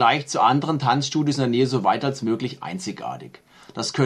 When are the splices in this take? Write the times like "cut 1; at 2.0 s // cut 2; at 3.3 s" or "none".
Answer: none